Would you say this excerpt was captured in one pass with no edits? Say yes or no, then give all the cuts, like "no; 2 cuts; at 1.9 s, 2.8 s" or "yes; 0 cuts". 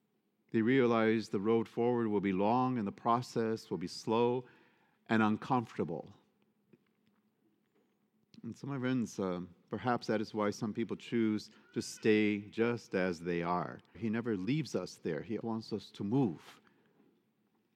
no; 2 cuts; at 13.9 s, 15.4 s